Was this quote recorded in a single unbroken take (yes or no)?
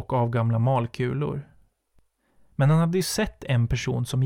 yes